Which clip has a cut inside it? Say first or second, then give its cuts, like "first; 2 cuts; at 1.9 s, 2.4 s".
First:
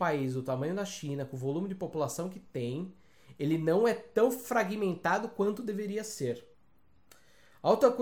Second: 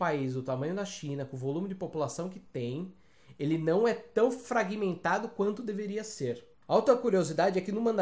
second; 1 cut; at 6.6 s